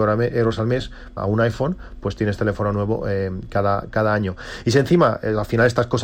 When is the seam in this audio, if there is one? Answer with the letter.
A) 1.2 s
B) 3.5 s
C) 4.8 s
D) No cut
A